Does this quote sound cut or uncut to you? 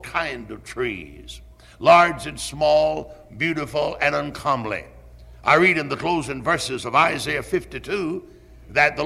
uncut